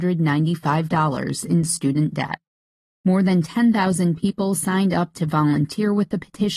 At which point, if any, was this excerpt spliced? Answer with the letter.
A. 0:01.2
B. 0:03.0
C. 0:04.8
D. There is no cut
B